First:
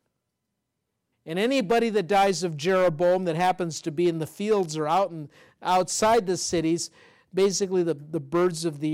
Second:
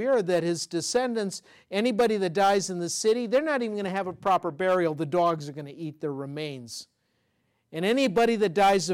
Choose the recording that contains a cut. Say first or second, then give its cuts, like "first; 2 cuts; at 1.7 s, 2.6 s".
first; 1 cut; at 1.1 s